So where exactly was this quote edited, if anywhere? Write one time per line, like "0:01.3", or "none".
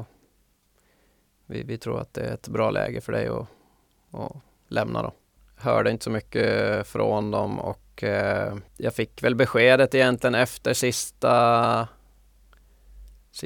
0:05.4
0:08.7